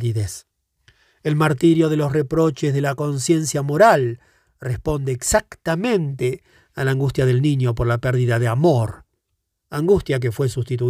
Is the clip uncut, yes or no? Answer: yes